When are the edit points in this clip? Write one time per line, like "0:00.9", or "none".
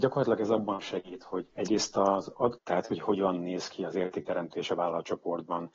0:01.5
0:02.6